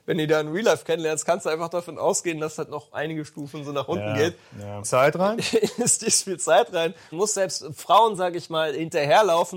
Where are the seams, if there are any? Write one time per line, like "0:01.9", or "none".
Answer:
0:04.8
0:07.1

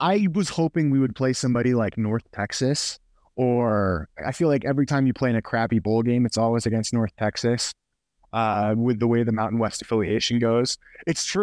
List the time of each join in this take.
0:04.1

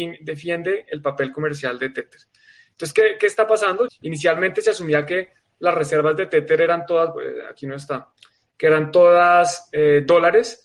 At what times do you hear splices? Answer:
0:03.9

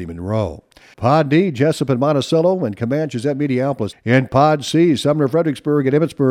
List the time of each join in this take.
0:00.9
0:03.9

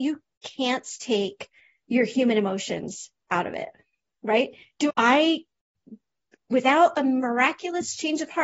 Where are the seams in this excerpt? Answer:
0:04.9

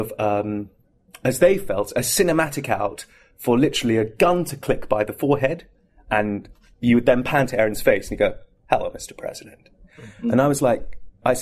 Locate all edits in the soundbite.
none

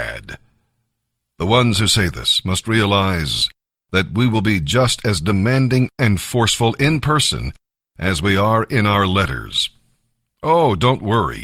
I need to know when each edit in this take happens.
none

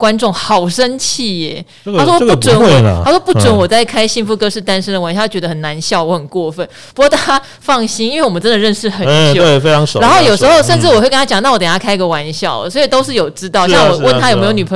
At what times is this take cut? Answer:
none

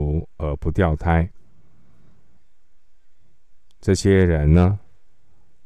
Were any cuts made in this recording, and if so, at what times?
none

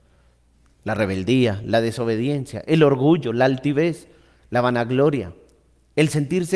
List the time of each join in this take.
none

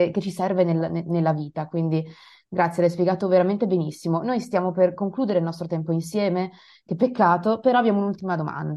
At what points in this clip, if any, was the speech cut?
none

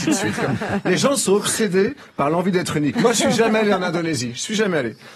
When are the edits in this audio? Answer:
0:02.9

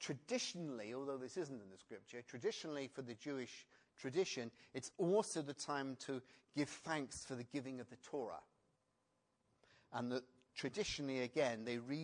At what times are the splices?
none

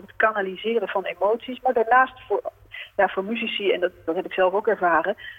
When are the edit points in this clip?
none

